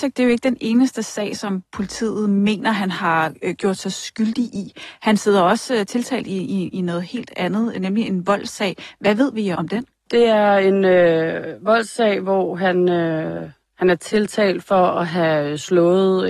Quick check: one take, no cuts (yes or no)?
no